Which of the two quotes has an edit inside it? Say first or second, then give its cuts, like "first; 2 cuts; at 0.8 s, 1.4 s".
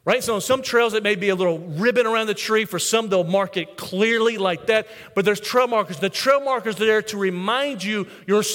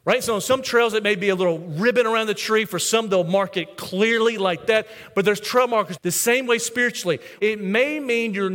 second; 2 cuts; at 6.0 s, 7.4 s